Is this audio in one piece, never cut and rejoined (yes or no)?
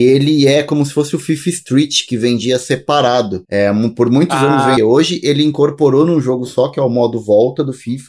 no